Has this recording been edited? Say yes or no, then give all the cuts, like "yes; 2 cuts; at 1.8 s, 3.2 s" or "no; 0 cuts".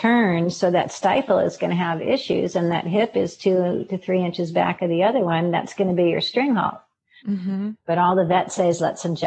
yes; 1 cut; at 7.2 s